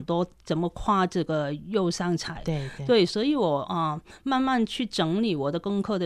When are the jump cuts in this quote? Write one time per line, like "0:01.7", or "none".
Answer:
none